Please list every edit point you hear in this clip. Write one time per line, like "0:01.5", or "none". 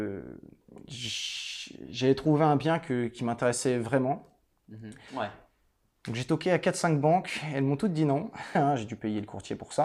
0:05.1
0:08.5